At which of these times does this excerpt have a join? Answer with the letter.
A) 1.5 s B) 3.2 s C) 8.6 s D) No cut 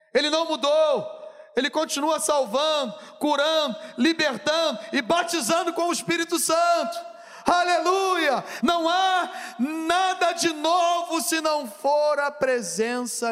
C